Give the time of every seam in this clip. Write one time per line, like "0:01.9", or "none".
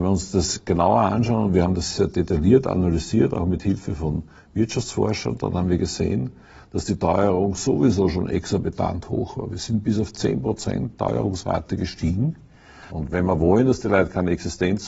0:01.9
0:12.9